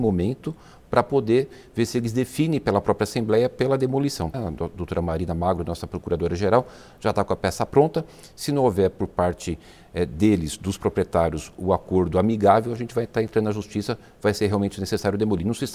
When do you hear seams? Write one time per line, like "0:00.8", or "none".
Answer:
0:04.3